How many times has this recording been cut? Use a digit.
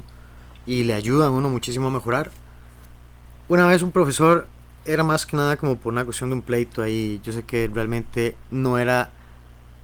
0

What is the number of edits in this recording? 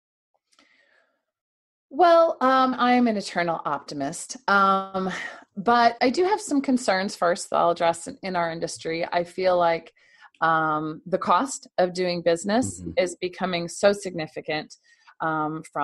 2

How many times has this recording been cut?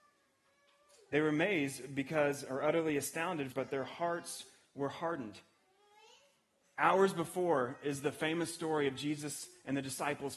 1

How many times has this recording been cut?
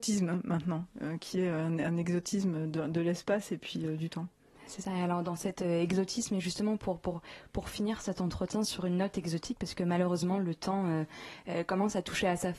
0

